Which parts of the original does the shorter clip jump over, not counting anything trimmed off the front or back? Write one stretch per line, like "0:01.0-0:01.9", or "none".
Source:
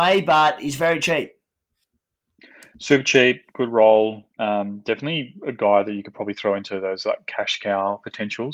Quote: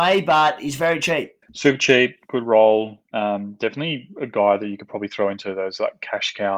0:01.4-0:02.7